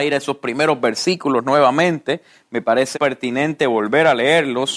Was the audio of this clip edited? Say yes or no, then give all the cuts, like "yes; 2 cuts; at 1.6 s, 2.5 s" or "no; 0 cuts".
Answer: yes; 1 cut; at 2.9 s